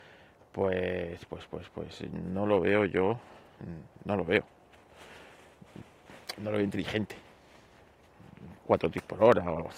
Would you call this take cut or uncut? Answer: cut